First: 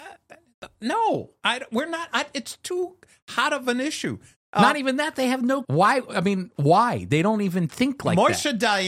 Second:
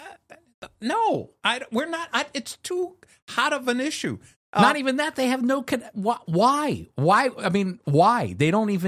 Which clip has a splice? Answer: first; 1 cut; at 5.6 s

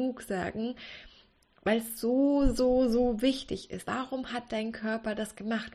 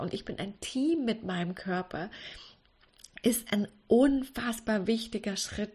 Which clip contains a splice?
first; 1 cut; at 3.9 s

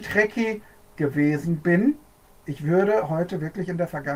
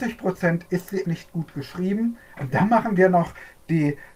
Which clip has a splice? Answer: second; 2 cuts; at 1.0 s, 2.3 s

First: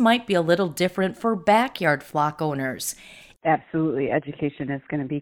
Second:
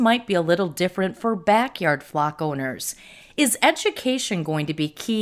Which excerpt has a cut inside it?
first; 1 cut; at 3.3 s

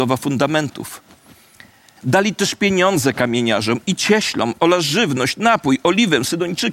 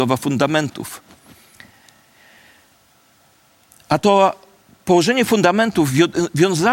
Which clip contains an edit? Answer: first; 1 cut; at 2.0 s

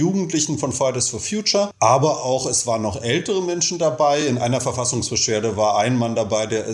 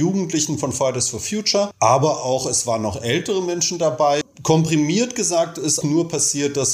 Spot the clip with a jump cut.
second; 2 cuts; at 4.2 s, 5.8 s

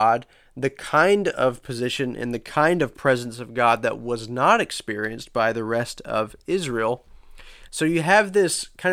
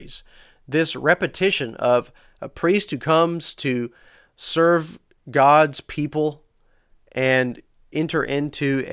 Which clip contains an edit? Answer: first; 1 cut; at 7.7 s

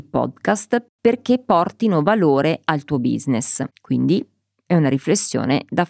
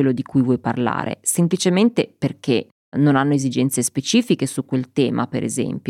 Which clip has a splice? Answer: first; 1 cut; at 3.7 s

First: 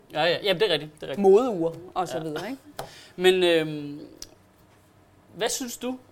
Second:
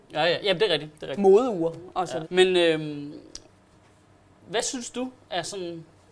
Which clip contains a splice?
second; 1 cut; at 2.2 s

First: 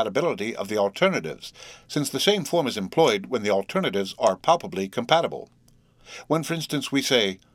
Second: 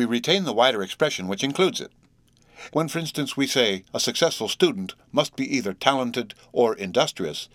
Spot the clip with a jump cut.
second; 2 cuts; at 2.7 s, 3.9 s

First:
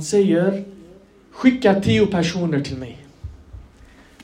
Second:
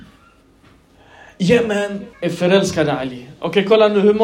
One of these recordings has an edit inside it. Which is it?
second; 1 cut; at 2.1 s

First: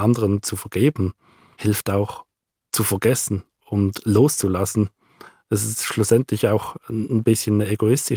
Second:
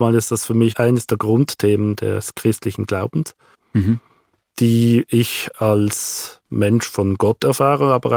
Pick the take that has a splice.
second; 1 cut; at 3.5 s

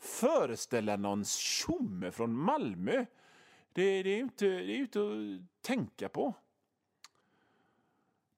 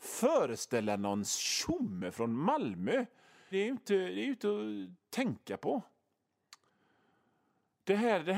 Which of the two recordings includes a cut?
second; 1 cut; at 3.5 s

